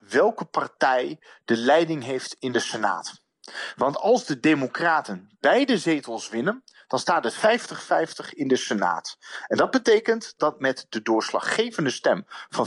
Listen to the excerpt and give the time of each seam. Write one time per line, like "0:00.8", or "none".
none